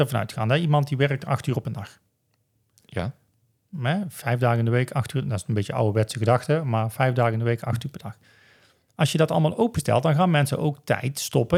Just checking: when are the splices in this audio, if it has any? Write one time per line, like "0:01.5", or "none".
none